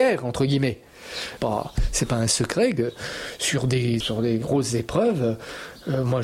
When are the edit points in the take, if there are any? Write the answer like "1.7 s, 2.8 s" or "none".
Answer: 1.4 s, 4.0 s